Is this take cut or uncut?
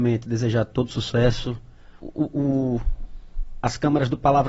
cut